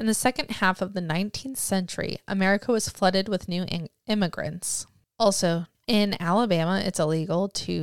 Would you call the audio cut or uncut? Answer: cut